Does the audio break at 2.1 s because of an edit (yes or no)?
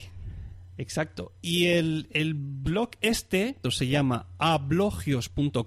no